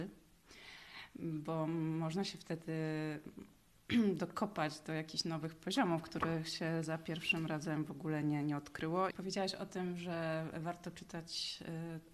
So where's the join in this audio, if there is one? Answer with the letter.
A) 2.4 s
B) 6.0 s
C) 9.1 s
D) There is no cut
C